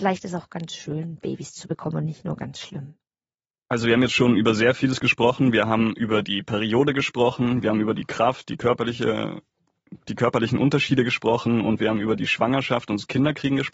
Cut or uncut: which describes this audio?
uncut